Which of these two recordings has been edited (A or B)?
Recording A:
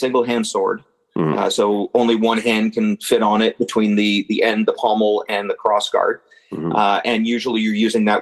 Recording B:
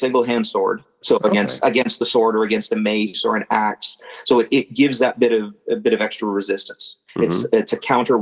B